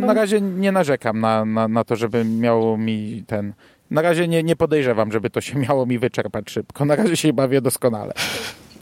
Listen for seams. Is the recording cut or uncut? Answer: uncut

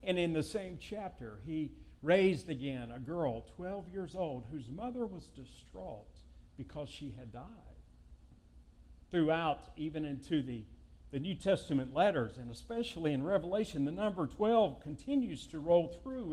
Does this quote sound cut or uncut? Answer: uncut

